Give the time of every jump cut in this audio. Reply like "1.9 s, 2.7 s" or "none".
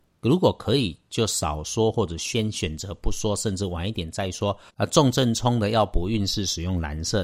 4.7 s